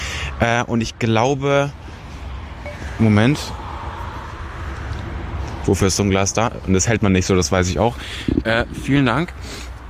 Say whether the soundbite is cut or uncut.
uncut